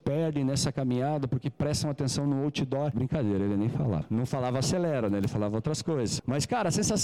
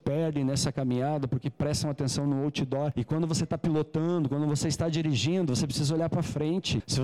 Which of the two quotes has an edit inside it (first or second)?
first